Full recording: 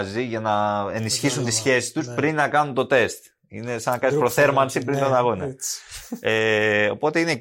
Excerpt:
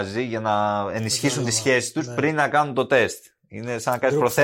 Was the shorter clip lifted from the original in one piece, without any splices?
yes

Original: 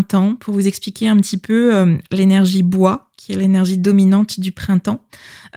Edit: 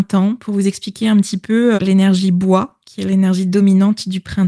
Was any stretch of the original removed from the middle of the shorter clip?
yes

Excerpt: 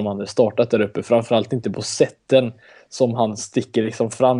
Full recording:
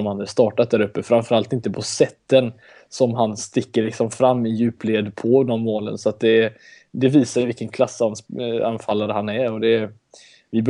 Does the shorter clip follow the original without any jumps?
yes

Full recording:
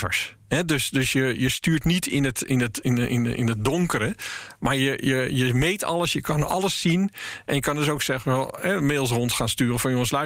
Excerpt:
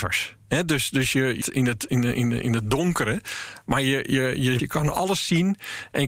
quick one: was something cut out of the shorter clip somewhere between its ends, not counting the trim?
yes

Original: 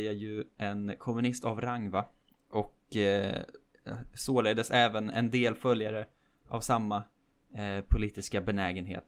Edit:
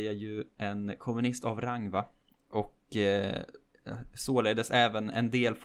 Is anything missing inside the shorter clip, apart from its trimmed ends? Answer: no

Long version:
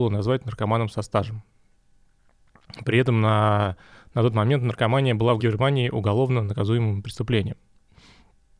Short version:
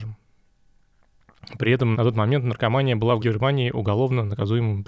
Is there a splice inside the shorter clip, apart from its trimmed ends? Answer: yes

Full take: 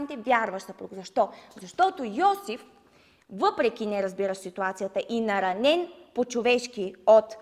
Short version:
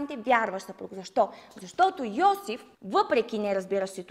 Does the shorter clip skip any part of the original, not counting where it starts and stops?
yes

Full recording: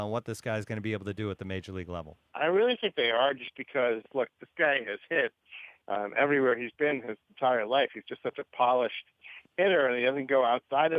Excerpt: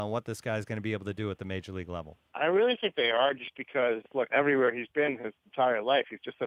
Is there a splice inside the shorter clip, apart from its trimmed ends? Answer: yes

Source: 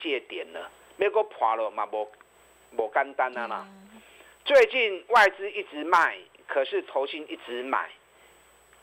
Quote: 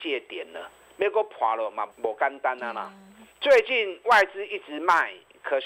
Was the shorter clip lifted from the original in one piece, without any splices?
no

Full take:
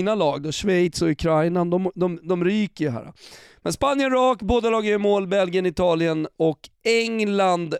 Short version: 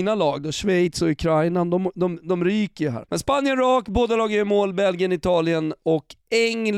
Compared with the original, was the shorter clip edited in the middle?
yes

